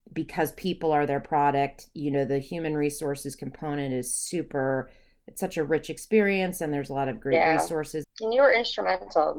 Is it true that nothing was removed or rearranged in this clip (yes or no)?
no